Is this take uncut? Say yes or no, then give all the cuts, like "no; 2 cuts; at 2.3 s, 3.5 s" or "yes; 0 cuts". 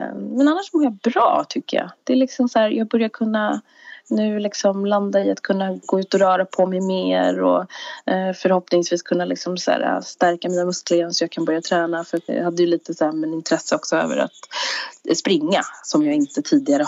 no; 1 cut; at 12.3 s